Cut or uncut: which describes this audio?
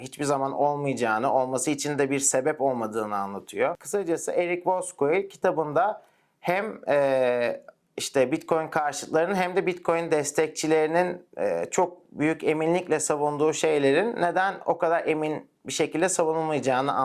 uncut